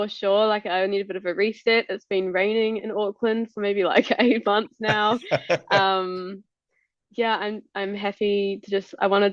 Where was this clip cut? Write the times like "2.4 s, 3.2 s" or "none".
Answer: none